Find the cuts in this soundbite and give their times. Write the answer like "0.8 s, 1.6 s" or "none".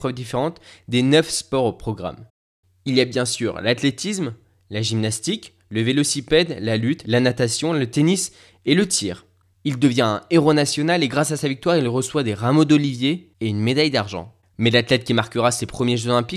7.0 s, 9.5 s, 14.4 s